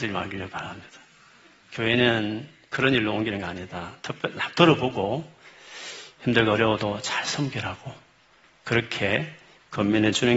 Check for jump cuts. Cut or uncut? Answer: uncut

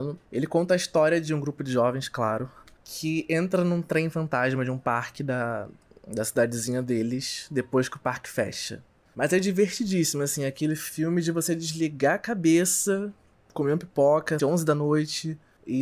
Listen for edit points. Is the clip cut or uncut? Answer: cut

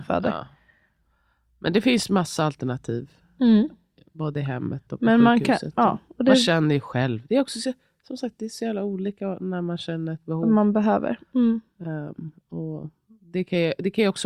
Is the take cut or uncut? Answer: uncut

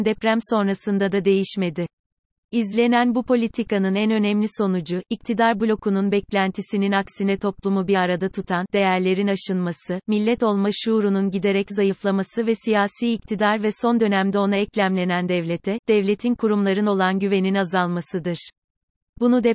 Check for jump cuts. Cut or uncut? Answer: uncut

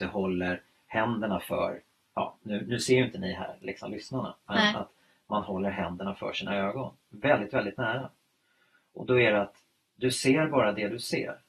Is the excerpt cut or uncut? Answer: uncut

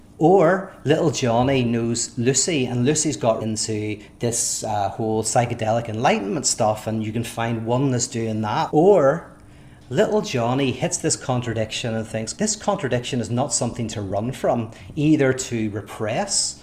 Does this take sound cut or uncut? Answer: cut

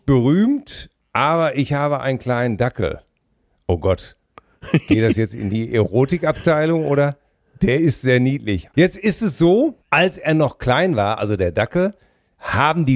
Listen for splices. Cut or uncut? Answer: cut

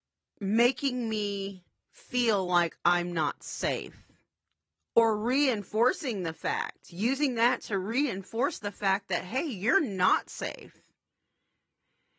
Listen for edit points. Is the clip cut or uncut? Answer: uncut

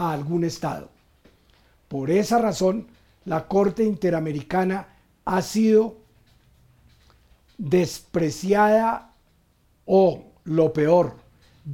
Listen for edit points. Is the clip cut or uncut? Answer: uncut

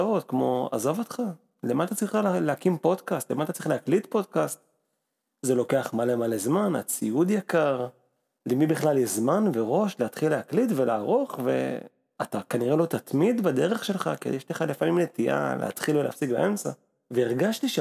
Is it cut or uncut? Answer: uncut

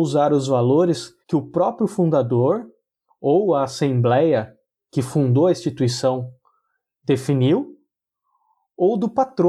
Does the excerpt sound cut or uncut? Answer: cut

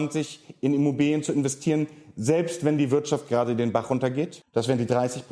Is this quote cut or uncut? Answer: uncut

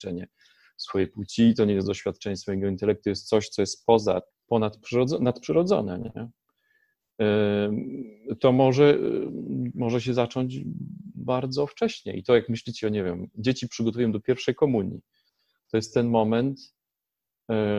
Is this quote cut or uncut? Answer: cut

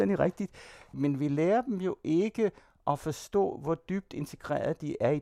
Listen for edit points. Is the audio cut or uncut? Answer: uncut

